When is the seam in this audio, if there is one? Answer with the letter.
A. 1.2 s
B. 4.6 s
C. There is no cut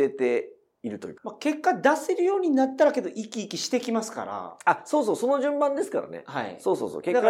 A